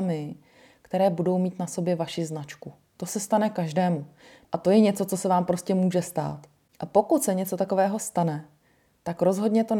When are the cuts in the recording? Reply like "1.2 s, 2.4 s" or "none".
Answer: 2.9 s, 4.4 s